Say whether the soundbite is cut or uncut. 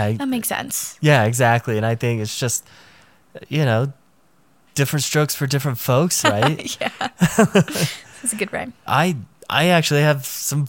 cut